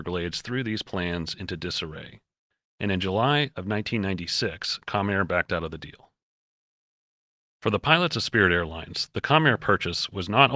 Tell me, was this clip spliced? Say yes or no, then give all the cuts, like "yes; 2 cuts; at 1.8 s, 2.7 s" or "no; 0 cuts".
no; 0 cuts